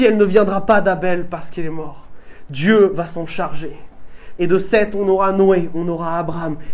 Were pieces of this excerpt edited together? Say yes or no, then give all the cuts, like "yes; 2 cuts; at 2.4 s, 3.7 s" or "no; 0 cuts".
yes; 1 cut; at 4.4 s